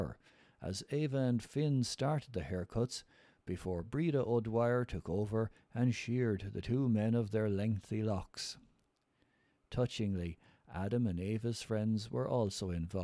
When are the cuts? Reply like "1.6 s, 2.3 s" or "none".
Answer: none